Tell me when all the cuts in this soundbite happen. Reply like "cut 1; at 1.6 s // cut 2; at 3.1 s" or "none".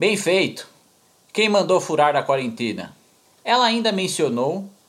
cut 1; at 3.3 s